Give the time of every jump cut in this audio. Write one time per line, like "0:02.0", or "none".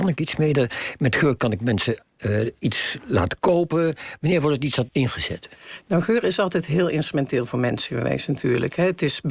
0:04.9